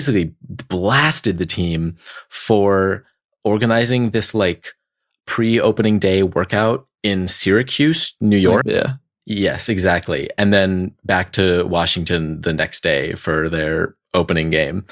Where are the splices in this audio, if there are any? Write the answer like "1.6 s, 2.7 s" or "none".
8.6 s

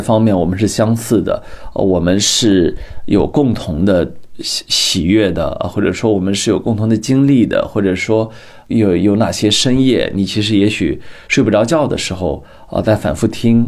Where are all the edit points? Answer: none

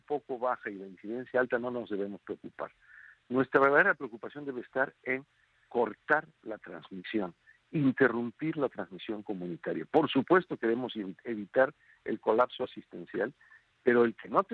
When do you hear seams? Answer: none

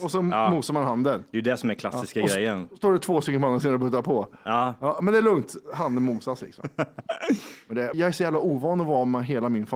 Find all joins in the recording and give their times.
7.9 s

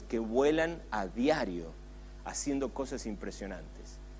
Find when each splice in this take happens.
none

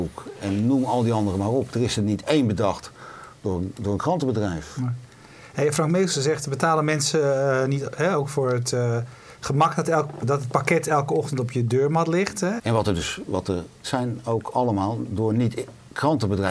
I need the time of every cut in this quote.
10.2 s, 12.6 s, 13.8 s

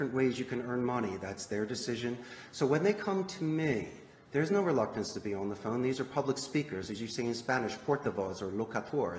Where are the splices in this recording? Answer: none

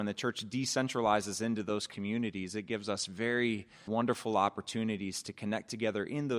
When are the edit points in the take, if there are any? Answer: 3.9 s

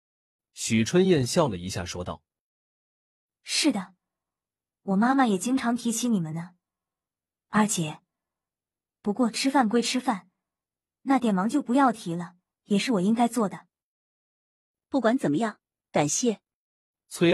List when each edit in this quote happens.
none

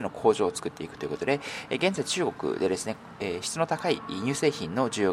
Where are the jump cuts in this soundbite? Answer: none

